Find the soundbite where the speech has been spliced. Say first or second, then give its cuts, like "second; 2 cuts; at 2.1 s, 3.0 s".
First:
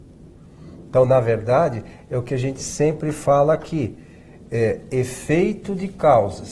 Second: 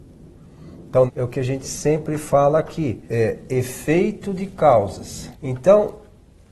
second; 3 cuts; at 1.1 s, 3.1 s, 5.3 s